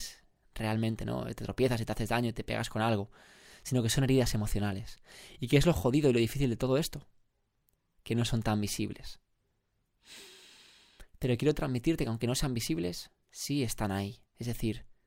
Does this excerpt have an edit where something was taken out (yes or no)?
no